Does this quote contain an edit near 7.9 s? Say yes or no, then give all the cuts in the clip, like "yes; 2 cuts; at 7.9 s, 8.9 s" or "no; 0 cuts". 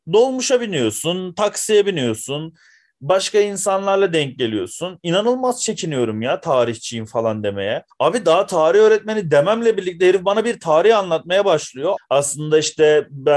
yes; 2 cuts; at 7.9 s, 12.0 s